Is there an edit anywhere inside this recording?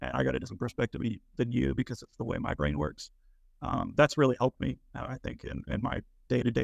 no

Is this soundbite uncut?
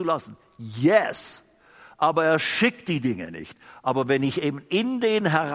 yes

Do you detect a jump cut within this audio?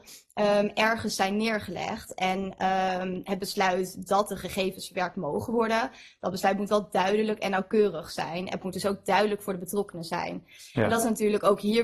no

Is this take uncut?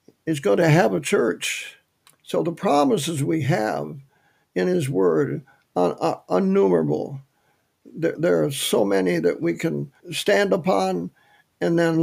no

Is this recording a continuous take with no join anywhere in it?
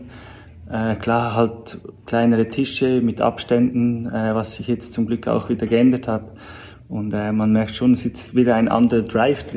yes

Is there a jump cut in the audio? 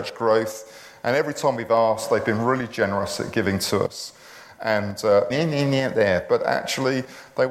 yes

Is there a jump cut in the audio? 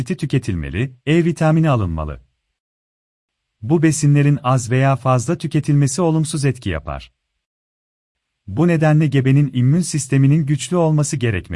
yes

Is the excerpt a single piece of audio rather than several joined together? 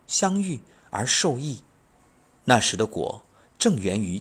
yes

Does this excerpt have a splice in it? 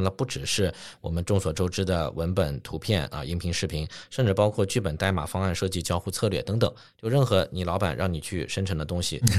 no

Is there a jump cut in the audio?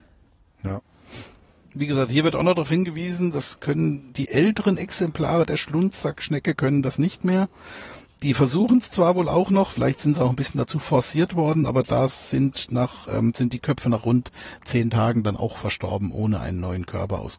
no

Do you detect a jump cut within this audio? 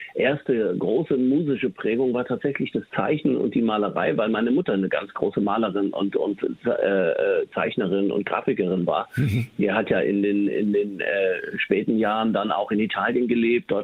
no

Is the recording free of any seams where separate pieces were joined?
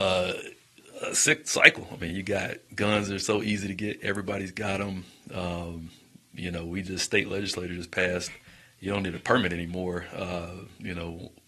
yes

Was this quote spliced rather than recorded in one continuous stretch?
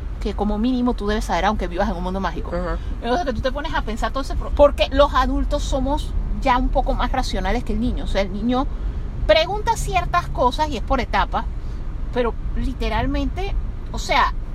yes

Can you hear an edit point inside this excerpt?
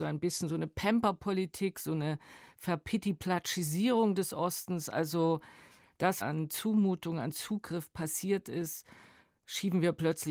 yes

